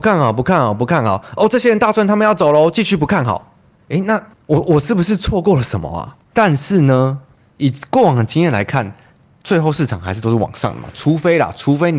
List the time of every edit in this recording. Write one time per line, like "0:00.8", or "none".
0:06.2